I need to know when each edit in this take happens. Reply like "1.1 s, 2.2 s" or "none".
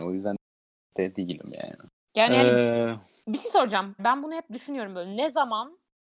2.0 s, 4.0 s